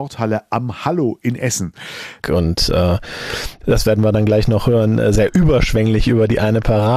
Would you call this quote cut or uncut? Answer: cut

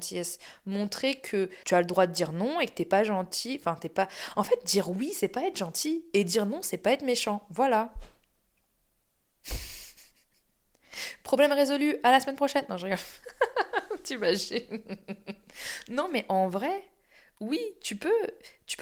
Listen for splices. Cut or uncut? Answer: uncut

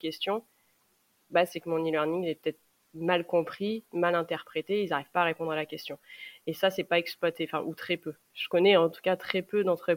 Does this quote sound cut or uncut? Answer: uncut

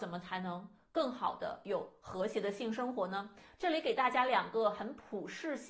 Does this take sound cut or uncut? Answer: uncut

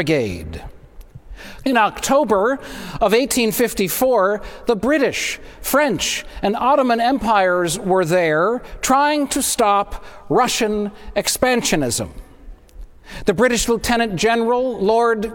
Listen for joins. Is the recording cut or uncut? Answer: cut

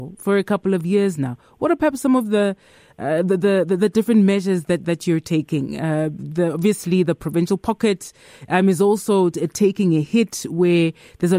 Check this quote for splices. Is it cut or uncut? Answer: uncut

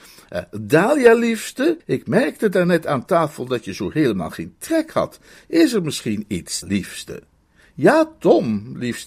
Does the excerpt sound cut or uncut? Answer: cut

